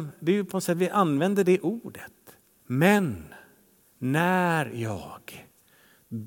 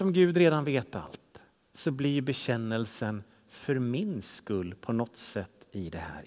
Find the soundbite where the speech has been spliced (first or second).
first